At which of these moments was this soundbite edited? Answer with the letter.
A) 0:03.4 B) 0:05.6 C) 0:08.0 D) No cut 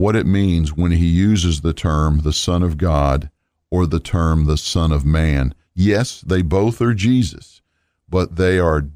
B